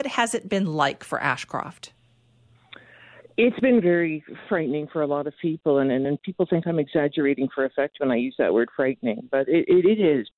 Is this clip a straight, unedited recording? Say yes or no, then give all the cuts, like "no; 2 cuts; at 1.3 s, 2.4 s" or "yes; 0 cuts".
yes; 0 cuts